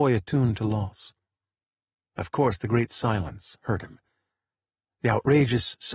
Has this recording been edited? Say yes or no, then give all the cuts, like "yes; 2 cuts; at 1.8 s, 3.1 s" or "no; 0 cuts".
no; 0 cuts